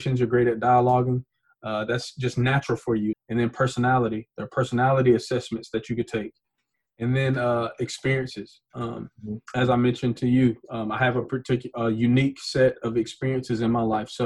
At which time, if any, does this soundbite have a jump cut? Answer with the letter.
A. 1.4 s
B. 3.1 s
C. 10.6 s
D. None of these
B